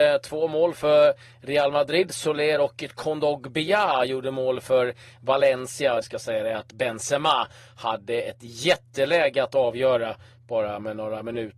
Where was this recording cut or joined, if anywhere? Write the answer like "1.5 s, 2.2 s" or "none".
6.0 s